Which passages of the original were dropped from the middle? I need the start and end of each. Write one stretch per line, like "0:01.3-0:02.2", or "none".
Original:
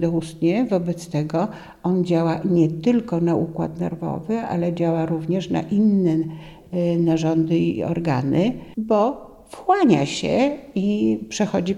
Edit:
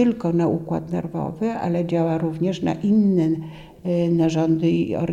none